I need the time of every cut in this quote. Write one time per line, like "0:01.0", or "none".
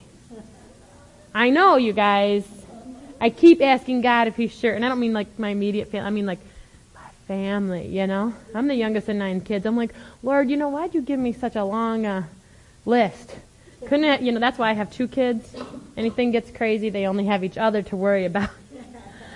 none